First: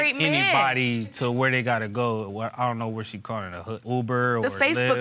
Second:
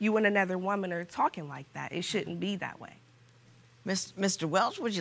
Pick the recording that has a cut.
first; 1 cut; at 3.8 s

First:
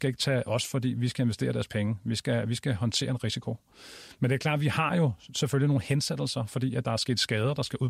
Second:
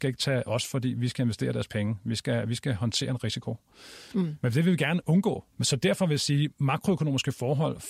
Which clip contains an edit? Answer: second; 2 cuts; at 4.1 s, 5.5 s

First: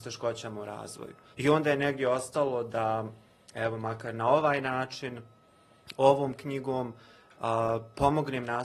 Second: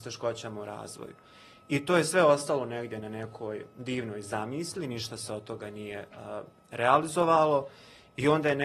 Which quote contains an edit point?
first; 1 cut; at 1.3 s

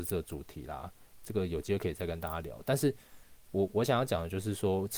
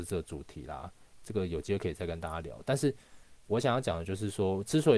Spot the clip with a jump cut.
second; 1 cut; at 3.5 s

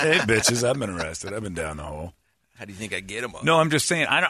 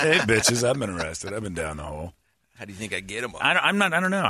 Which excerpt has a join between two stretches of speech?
second; 1 cut; at 3.4 s

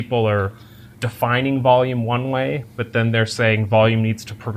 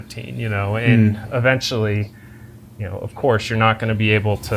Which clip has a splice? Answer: first; 1 cut; at 0.9 s

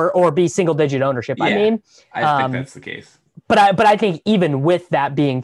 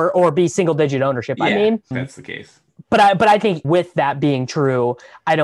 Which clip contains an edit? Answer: second; 2 cuts; at 1.9 s, 3.6 s

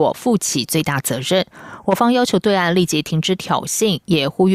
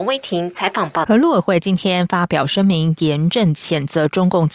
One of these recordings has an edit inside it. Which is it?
second; 1 cut; at 1.0 s

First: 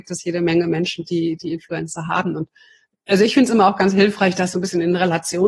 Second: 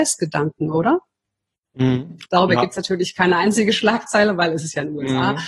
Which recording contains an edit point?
second; 1 cut; at 2.3 s

